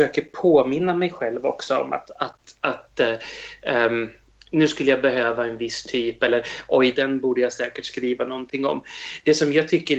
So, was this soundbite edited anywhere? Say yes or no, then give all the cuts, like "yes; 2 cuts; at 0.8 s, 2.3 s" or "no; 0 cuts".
yes; 1 cut; at 6.9 s